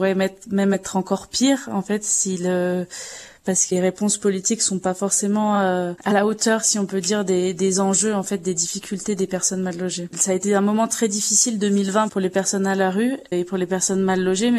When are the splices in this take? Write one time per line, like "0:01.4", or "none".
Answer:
0:10.1